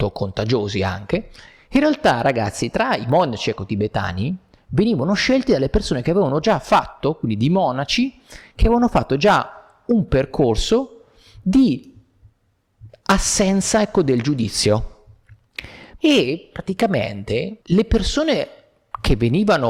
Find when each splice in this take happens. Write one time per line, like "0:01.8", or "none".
0:16.0
0:17.6